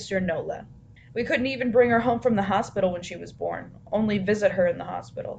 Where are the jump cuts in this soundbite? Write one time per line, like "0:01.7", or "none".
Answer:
0:01.0